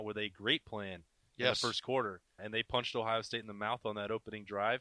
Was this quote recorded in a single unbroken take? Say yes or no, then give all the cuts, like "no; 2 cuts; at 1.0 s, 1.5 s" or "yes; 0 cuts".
no; 1 cut; at 2.4 s